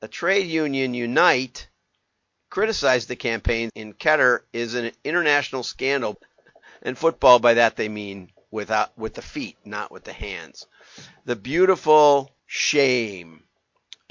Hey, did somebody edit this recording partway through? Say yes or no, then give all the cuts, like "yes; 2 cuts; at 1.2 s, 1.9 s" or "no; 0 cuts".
yes; 3 cuts; at 3.7 s, 6.1 s, 12.4 s